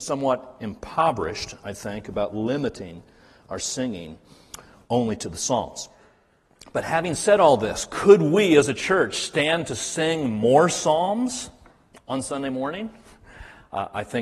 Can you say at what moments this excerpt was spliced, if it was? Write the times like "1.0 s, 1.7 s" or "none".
none